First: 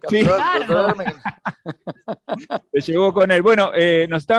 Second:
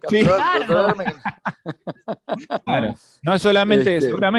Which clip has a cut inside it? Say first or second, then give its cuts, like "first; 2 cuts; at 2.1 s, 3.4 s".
second; 1 cut; at 2.7 s